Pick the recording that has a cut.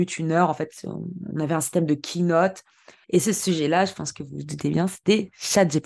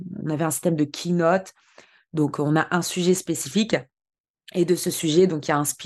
first; 1 cut; at 3.0 s

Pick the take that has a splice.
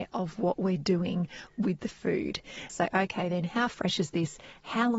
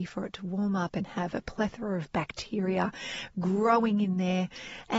first; 1 cut; at 2.7 s

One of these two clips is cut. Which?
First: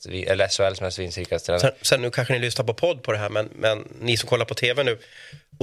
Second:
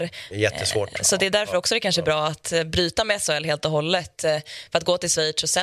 first; 1 cut; at 2.0 s

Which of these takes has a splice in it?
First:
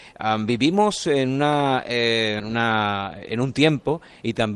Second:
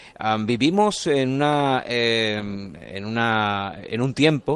first; 1 cut; at 2.4 s

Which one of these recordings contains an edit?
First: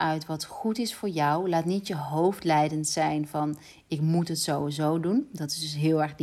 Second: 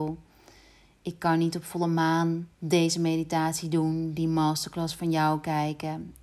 second; 1 cut; at 2.5 s

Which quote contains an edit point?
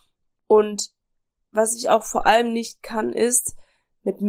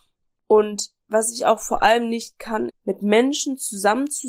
second; 2 cuts; at 1.0 s, 2.7 s

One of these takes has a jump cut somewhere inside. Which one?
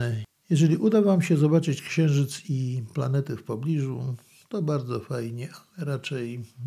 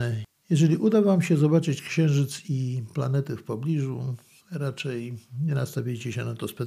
second; 1 cut; at 4.4 s

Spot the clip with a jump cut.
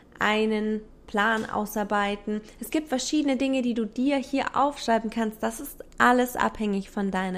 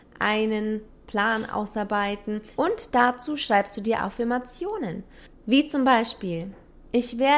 second; 1 cut; at 2.5 s

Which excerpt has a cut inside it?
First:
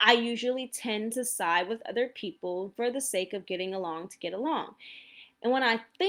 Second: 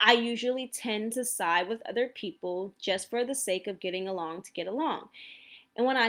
first; 1 cut; at 2.7 s

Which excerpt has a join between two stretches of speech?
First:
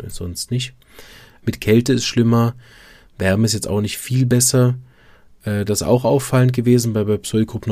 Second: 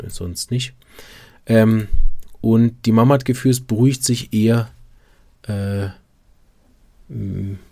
first; 1 cut; at 1.4 s

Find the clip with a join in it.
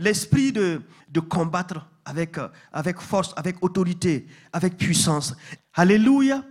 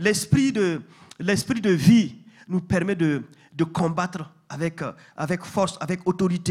first; 2 cuts; at 1.0 s, 5.6 s

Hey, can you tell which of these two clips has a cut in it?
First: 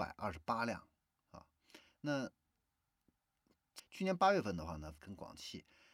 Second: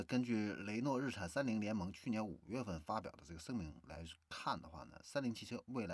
first; 2 cuts; at 3.8 s, 5.0 s

